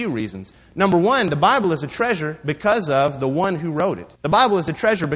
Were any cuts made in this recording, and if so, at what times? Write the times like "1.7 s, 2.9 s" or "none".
4.2 s